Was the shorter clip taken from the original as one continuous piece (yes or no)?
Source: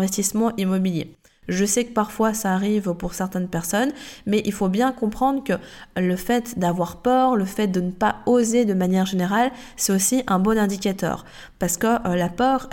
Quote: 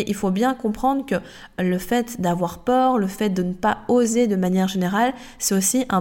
yes